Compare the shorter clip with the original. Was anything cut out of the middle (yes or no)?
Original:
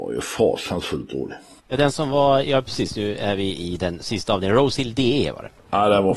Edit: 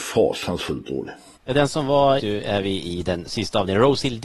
yes